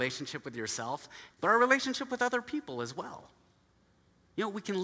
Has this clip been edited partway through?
yes; 1 cut; at 1.3 s

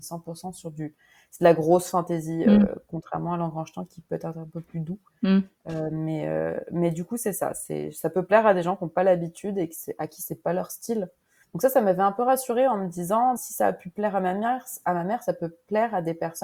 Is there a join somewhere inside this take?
yes; 2 cuts; at 11.4 s, 13.4 s

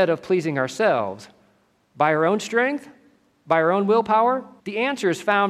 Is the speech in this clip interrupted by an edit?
yes; 1 cut; at 4.6 s

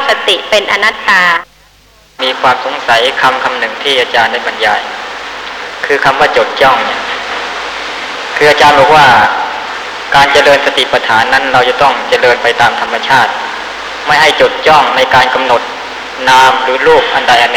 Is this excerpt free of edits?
yes; 0 cuts

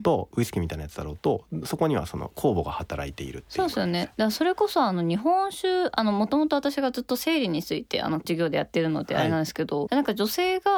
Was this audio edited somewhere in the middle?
yes; 1 cut; at 9.9 s

